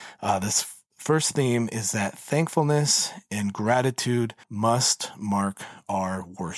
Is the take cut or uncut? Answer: cut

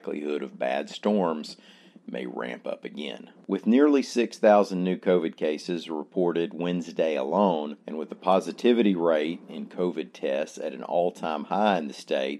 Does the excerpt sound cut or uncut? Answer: cut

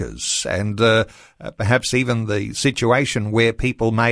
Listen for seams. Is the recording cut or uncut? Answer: uncut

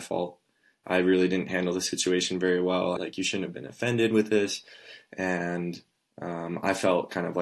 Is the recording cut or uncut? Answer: cut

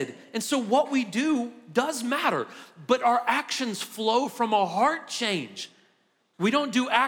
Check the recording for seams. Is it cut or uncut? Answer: uncut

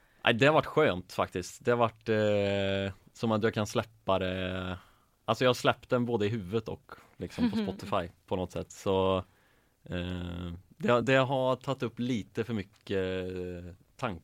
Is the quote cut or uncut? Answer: uncut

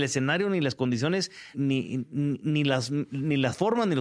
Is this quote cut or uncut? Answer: cut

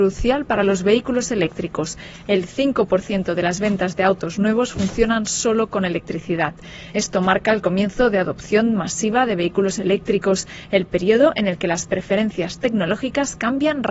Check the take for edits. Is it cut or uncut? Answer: uncut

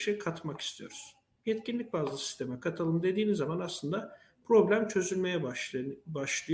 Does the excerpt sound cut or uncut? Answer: uncut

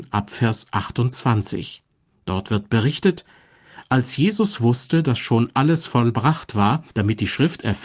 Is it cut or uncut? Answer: cut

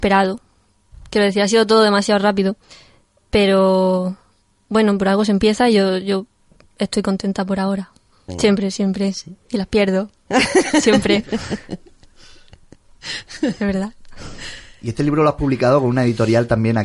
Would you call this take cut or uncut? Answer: cut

